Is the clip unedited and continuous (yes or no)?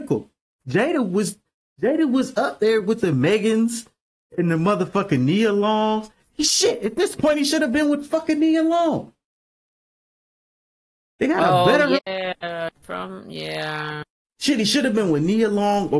no